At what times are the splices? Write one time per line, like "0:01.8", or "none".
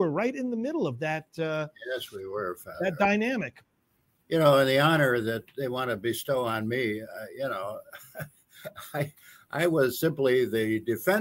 none